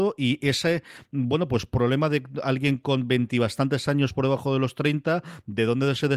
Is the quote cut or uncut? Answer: uncut